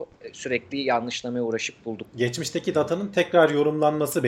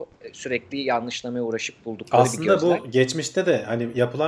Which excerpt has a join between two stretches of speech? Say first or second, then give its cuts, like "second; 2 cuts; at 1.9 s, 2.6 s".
first; 1 cut; at 2.0 s